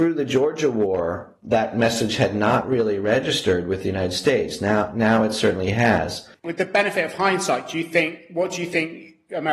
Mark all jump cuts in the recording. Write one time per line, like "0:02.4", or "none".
none